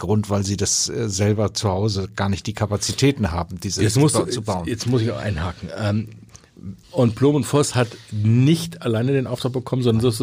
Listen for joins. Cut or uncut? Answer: cut